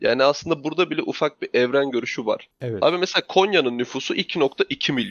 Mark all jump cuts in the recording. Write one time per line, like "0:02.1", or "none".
none